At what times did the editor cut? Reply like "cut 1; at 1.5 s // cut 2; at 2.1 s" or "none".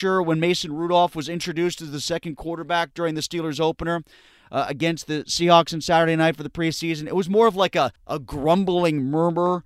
cut 1; at 8.0 s